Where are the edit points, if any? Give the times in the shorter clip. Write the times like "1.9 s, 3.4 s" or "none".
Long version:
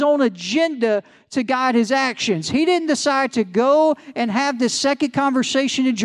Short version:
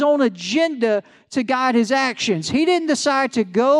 none

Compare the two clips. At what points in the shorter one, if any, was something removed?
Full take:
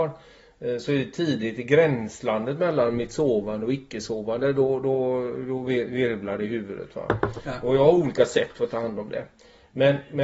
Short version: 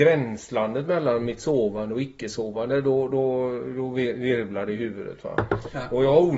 none

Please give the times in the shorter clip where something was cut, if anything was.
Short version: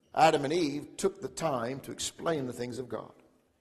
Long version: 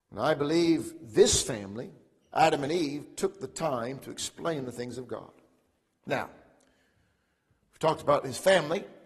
none

